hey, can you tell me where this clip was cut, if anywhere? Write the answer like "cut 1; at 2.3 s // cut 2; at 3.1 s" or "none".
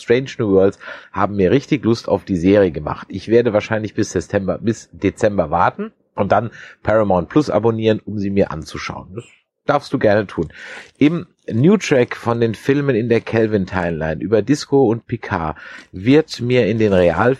none